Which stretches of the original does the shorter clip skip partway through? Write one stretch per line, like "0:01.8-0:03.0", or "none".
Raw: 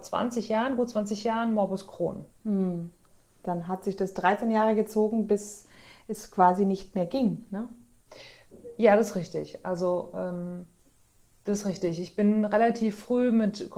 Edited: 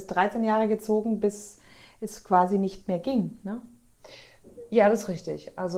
none